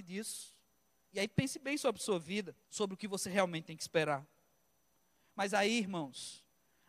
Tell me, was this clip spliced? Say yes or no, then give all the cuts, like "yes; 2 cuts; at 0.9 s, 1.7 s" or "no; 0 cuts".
yes; 1 cut; at 2.6 s